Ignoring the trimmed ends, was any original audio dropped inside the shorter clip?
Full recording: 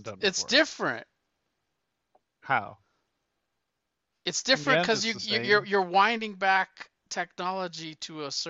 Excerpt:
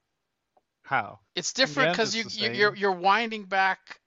yes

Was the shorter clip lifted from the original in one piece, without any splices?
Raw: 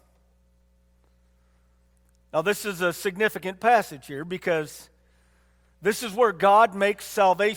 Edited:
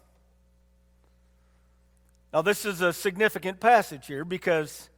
yes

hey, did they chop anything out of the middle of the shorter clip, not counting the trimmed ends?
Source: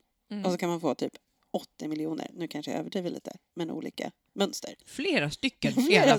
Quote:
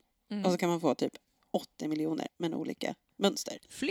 yes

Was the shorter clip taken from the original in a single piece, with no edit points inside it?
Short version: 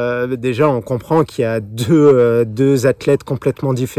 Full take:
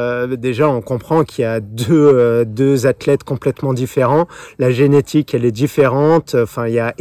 yes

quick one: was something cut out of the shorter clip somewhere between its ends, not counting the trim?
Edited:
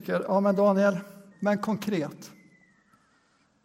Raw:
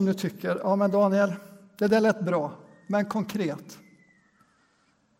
yes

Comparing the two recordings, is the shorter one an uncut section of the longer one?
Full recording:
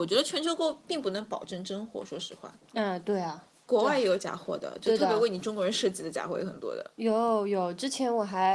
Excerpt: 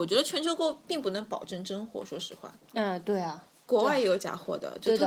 yes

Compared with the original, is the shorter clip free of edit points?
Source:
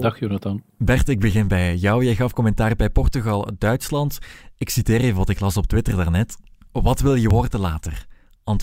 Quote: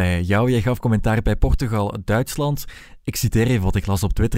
yes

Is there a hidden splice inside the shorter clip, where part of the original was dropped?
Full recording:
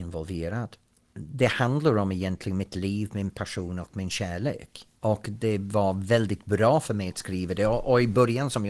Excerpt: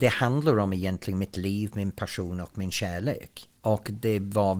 no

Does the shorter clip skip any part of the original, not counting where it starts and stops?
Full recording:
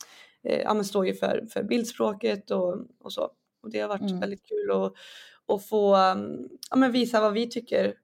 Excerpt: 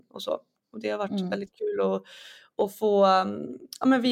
no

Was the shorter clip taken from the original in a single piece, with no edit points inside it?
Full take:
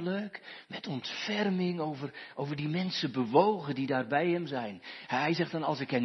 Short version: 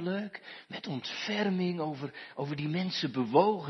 yes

